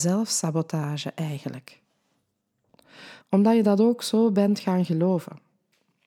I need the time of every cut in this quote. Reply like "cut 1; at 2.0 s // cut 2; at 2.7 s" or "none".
cut 1; at 3.2 s